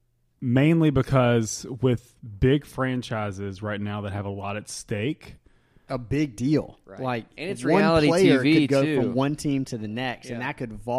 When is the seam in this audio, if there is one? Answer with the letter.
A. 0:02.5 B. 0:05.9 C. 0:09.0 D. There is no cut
B